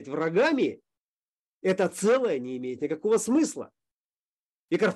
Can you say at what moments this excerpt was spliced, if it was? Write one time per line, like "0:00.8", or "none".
none